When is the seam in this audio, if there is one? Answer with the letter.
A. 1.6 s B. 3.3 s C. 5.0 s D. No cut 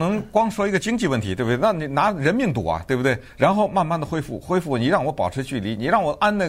B